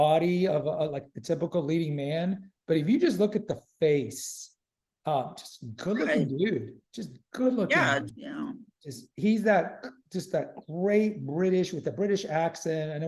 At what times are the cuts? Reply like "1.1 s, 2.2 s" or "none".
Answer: 8.1 s